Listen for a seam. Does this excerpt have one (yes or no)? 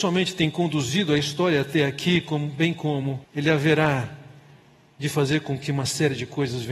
yes